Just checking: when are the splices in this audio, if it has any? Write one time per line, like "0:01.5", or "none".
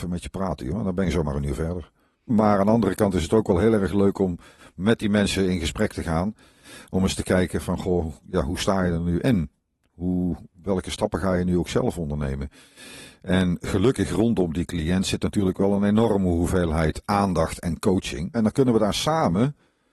0:02.3
0:18.3